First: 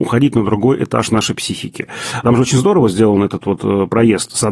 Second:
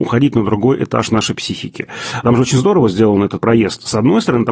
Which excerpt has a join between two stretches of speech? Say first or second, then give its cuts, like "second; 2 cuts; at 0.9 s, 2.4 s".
second; 1 cut; at 3.4 s